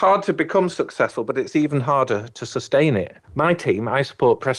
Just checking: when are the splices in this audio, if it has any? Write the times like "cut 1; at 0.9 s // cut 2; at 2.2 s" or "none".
cut 1; at 3.2 s